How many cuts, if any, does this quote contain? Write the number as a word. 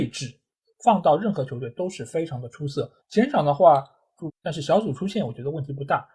two